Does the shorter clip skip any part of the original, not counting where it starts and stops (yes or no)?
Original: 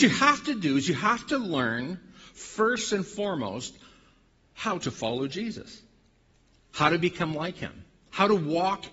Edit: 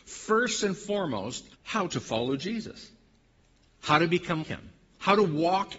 yes